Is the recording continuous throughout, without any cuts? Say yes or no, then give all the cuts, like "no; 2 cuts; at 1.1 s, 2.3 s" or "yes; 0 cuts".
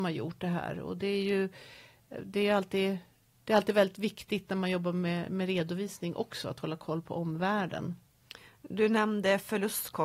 yes; 0 cuts